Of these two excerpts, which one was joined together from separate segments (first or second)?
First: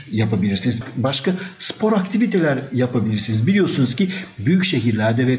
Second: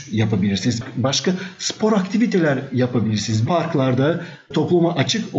second